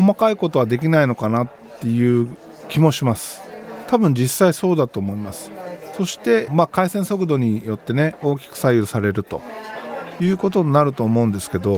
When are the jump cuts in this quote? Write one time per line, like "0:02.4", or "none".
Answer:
0:06.5